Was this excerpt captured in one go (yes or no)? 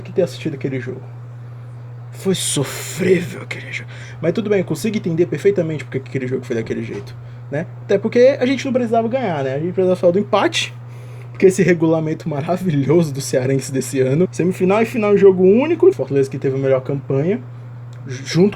no